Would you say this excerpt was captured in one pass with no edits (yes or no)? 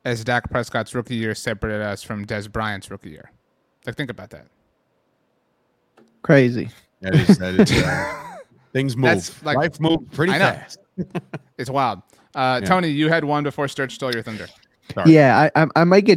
yes